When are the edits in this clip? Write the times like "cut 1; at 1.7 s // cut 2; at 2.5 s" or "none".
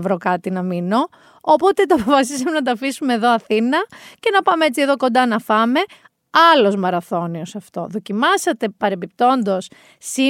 none